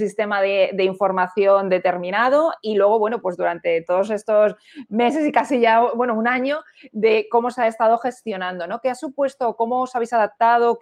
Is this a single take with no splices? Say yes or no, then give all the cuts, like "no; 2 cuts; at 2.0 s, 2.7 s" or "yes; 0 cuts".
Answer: yes; 0 cuts